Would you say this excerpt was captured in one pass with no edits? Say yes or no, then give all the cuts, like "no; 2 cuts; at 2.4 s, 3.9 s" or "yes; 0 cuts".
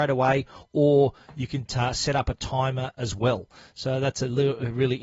yes; 0 cuts